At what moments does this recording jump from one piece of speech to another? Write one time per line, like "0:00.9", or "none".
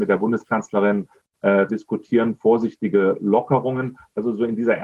0:01.7